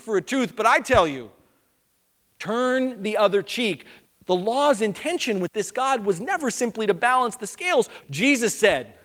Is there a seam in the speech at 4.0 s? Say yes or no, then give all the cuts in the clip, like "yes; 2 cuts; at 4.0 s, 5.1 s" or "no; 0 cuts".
yes; 2 cuts; at 4.0 s, 8.0 s